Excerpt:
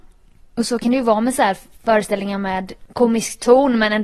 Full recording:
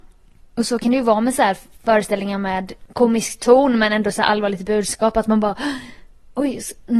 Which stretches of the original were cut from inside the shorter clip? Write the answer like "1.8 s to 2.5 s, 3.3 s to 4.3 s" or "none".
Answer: none